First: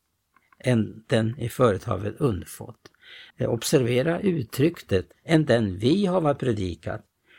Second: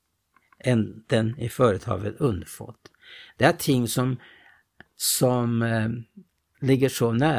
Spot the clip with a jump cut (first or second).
first